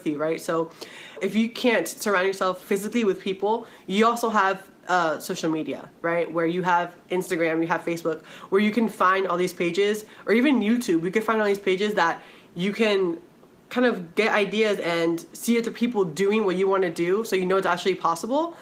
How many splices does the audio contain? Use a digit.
2